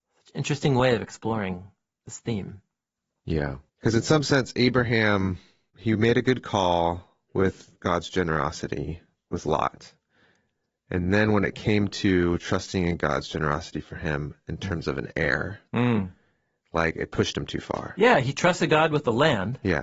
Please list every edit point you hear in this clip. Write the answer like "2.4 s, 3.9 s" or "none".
3.7 s